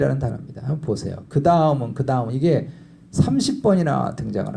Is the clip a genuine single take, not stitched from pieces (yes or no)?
yes